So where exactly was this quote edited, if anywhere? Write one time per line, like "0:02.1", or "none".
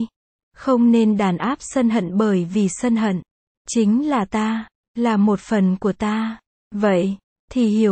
0:06.6